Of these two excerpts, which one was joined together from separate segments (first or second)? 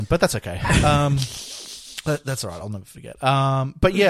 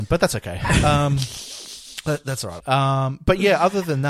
second